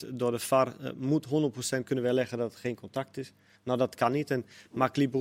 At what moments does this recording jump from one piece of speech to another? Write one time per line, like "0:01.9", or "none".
none